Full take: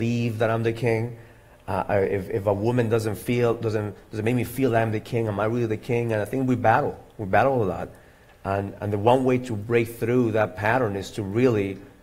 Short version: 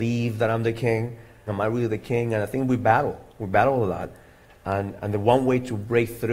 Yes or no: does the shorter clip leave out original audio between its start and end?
yes